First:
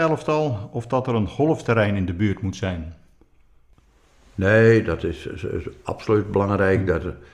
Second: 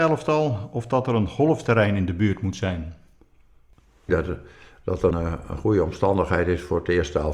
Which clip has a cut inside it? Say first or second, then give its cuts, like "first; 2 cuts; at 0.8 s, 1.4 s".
second; 2 cuts; at 4.1 s, 5.1 s